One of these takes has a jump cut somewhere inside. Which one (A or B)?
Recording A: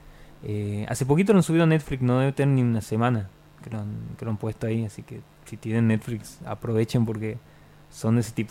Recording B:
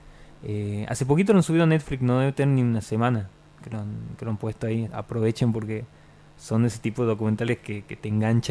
B